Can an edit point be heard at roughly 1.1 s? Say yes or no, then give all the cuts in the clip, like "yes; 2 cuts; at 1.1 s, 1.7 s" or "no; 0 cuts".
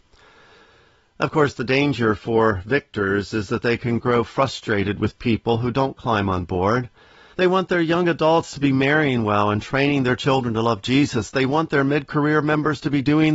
no; 1 cut; at 7.3 s